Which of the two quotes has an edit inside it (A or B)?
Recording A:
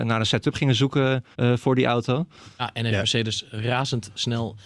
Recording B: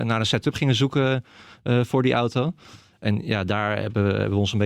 A